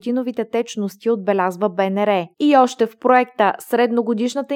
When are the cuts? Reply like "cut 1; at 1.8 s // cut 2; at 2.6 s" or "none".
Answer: cut 1; at 2.3 s